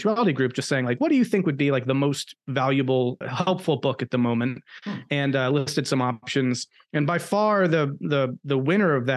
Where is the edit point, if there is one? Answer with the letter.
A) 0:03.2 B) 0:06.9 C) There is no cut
A